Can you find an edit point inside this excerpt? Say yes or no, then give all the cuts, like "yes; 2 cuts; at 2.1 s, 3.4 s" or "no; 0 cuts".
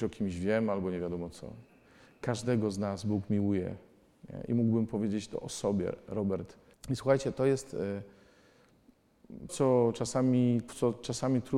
yes; 3 cuts; at 6.7 s, 9.5 s, 10.7 s